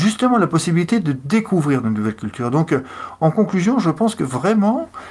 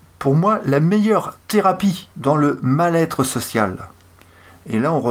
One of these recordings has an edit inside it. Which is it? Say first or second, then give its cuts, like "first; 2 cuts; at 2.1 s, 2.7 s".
second; 1 cut; at 2.1 s